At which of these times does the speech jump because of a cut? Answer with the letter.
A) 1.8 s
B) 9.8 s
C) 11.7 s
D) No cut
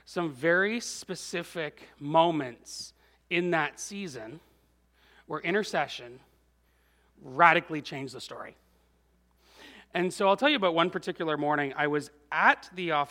D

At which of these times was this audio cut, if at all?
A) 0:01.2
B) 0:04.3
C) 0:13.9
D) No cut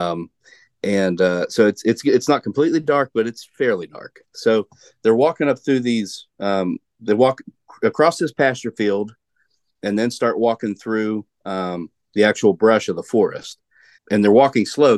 C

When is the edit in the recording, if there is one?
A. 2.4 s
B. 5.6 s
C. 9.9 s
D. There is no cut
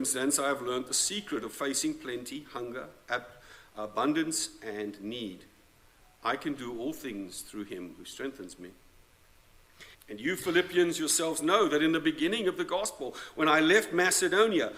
C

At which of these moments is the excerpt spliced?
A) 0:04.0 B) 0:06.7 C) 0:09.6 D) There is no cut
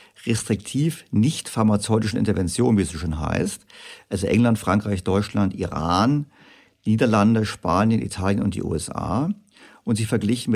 D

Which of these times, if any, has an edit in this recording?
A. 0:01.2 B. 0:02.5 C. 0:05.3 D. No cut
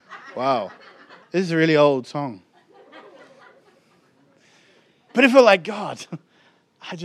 A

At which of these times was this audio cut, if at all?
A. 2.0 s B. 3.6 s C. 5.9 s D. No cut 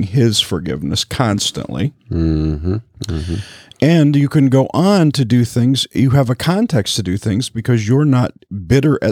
D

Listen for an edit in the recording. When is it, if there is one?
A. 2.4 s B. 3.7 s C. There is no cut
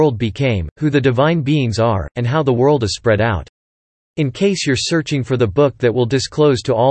C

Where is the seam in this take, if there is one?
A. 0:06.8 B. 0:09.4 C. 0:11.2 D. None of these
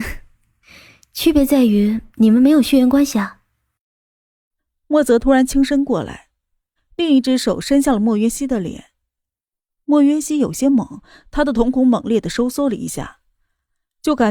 A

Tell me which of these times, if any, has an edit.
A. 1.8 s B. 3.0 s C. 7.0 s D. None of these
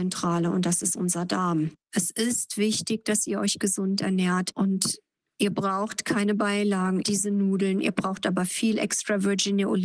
C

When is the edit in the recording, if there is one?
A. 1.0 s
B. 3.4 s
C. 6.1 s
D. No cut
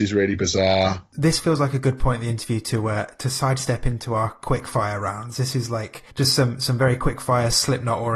C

